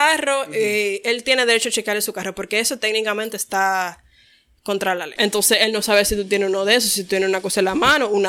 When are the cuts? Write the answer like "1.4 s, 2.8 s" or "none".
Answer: 5.2 s